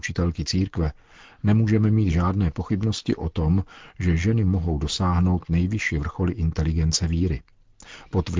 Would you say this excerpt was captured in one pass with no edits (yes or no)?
yes